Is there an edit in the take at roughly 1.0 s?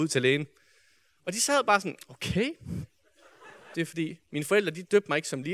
no; 1 cut; at 3.7 s

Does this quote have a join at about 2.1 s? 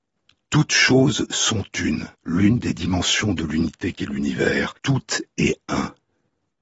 yes; 2 cuts; at 2.1 s, 4.8 s

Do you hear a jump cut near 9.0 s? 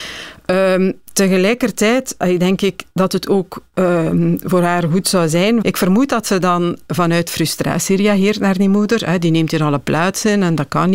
no; 1 cut; at 5.6 s

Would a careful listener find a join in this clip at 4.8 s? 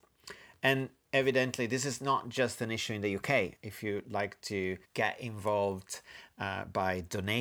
yes; 2 cuts; at 3.6 s, 4.8 s

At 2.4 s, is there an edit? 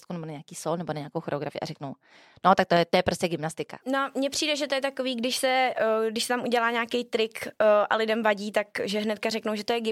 no; 1 cut; at 3.8 s

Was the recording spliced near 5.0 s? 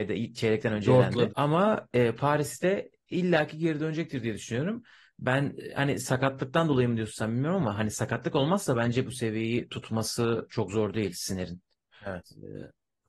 no; 2 cuts; at 1.3 s, 11.9 s

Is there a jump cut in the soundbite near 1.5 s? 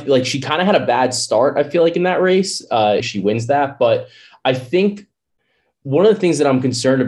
no; 1 cut; at 3.0 s

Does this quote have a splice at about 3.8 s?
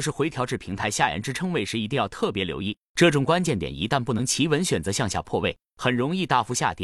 no; 0 cuts

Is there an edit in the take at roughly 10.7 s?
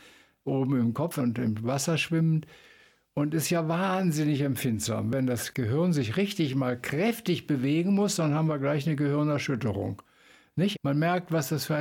yes; 1 cut; at 10.7 s

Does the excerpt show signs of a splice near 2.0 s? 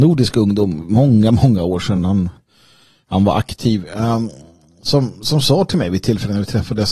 no; 0 cuts

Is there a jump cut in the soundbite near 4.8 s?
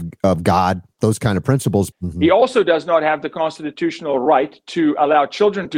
no; 1 cut; at 1.9 s

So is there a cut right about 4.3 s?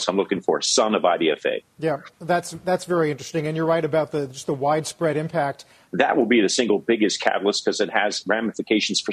no; 2 cuts; at 2.1 s, 5.9 s

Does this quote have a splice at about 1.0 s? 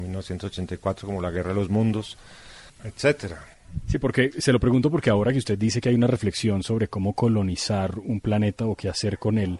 no; 1 cut; at 2.7 s

